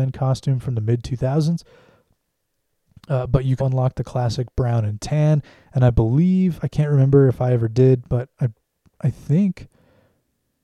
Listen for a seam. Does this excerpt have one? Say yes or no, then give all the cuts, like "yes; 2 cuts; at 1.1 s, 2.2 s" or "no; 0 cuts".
yes; 1 cut; at 3.6 s